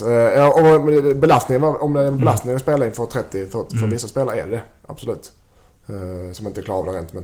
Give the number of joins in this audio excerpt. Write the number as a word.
zero